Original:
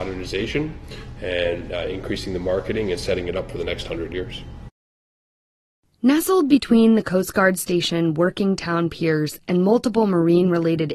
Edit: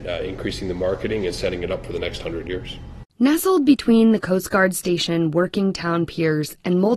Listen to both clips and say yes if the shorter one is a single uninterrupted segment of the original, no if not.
no